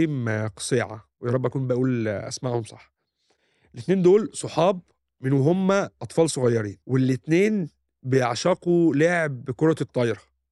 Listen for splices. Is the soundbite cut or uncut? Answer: cut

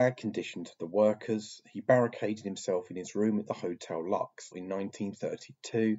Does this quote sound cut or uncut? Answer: cut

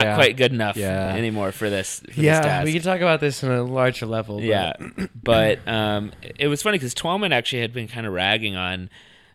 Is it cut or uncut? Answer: uncut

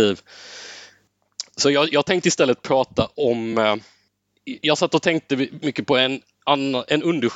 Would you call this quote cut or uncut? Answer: uncut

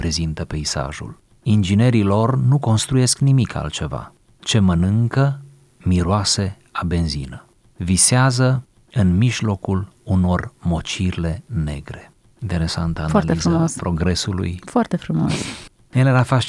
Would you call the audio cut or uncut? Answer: uncut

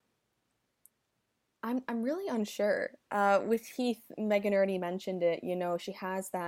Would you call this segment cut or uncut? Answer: uncut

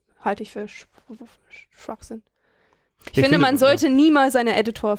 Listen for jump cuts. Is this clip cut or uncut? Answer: uncut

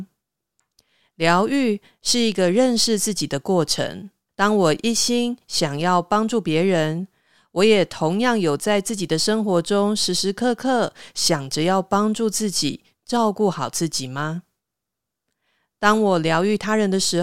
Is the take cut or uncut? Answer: cut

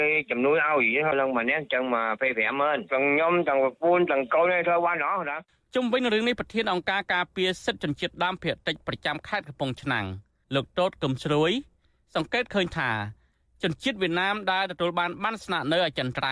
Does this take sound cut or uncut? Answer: uncut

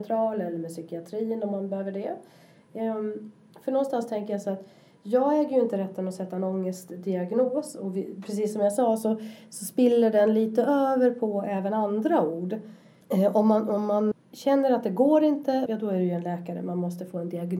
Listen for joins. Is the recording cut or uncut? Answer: cut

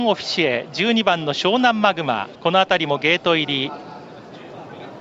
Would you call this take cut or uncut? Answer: cut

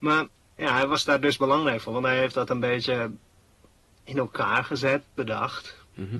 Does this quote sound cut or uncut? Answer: uncut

